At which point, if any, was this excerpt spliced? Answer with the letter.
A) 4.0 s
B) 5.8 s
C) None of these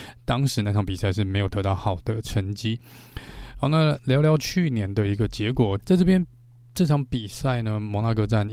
B